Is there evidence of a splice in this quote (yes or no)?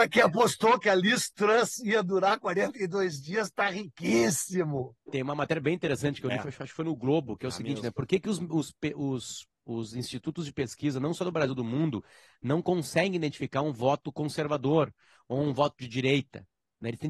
yes